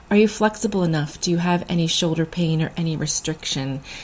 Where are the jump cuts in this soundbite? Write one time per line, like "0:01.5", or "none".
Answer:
none